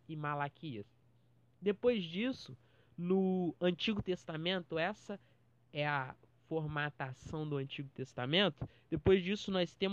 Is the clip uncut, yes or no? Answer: yes